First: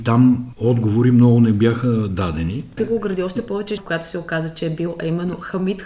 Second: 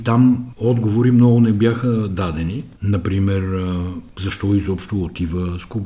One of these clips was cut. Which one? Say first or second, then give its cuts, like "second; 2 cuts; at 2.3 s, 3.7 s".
first; 2 cuts; at 2.8 s, 3.8 s